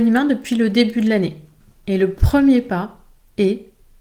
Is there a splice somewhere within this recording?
no; 0 cuts

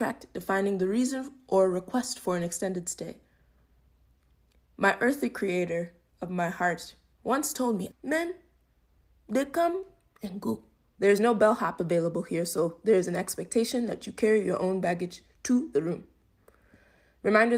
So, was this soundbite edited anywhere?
yes; 2 cuts; at 7.9 s, 10.9 s

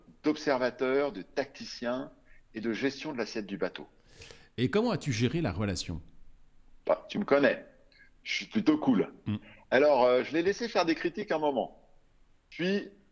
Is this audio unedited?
yes; 0 cuts

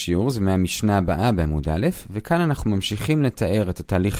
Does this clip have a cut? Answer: no; 0 cuts

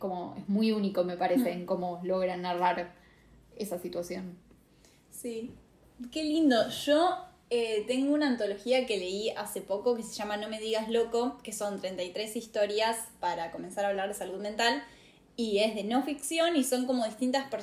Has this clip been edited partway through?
no; 0 cuts

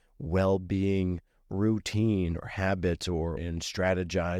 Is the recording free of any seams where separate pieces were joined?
no; 1 cut; at 3.4 s

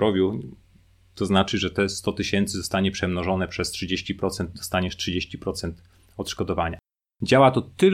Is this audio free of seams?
yes; 0 cuts

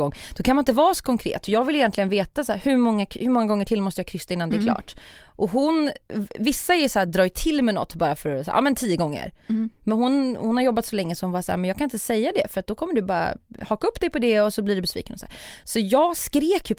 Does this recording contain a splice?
no; 0 cuts

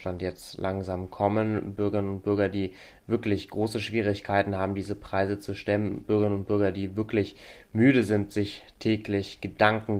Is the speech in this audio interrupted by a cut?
no; 0 cuts

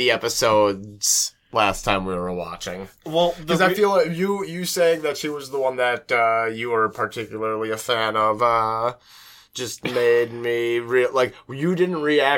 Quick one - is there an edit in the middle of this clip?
no; 0 cuts

